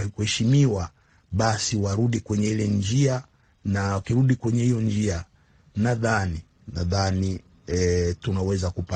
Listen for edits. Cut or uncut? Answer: uncut